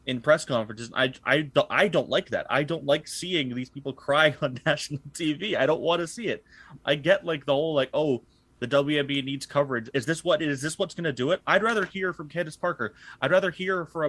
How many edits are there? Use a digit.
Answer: 1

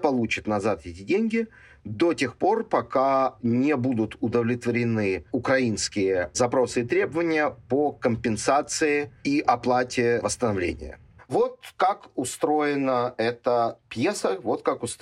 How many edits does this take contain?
1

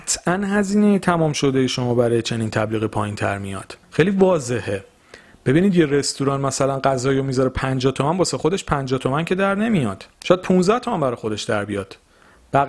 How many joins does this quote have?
2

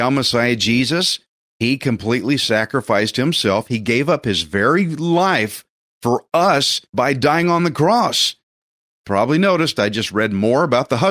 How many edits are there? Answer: 1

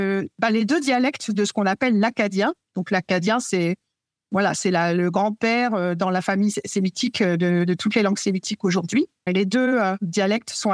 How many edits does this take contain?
1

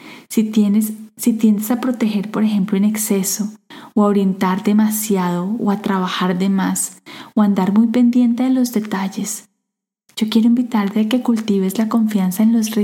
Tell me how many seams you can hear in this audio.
0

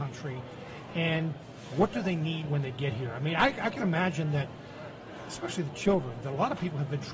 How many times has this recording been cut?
0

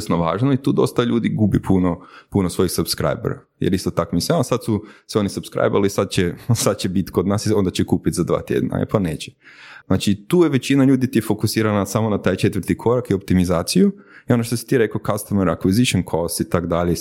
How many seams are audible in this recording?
1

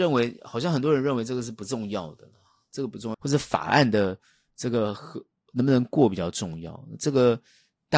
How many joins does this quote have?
1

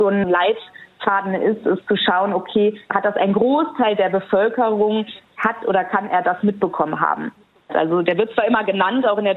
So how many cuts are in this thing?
2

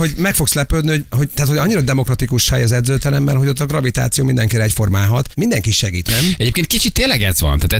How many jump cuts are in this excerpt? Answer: 1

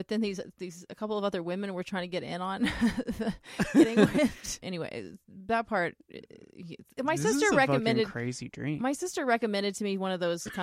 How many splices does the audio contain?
1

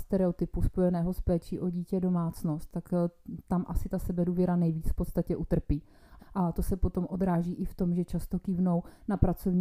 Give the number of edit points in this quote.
1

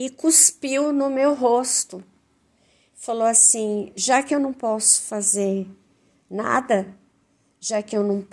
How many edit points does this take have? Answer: 0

